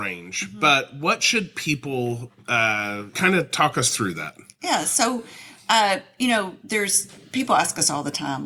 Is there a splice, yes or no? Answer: yes